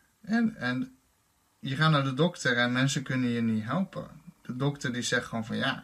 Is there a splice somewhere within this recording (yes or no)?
no